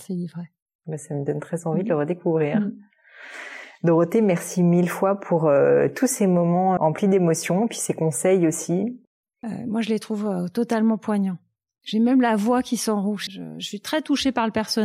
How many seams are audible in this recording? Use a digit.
3